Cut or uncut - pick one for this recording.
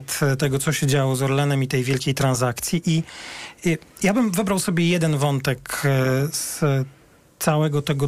uncut